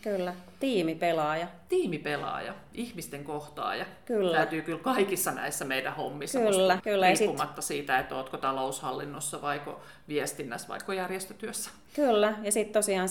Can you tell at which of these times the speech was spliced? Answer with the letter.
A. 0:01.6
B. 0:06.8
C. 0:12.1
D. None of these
B